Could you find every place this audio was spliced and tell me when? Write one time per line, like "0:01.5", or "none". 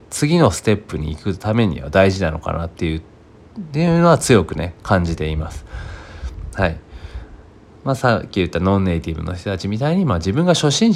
0:06.5